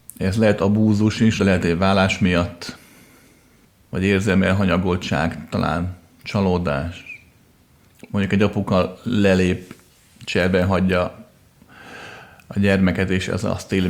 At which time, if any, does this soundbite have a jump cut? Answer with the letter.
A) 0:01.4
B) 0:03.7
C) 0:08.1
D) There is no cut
A